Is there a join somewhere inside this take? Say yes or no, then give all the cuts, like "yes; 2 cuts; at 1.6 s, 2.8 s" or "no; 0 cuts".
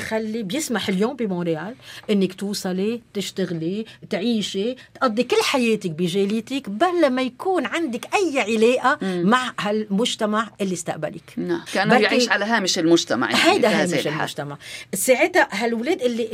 yes; 1 cut; at 11.7 s